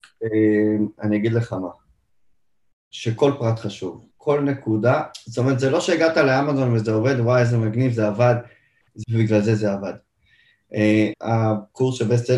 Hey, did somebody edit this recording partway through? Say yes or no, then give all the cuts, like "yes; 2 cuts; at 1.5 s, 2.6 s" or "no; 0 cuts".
yes; 3 cuts; at 4.1 s, 9.0 s, 11.1 s